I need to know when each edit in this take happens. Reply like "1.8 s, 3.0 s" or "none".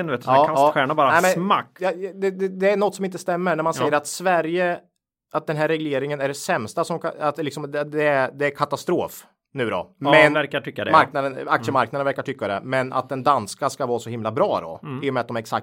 10.3 s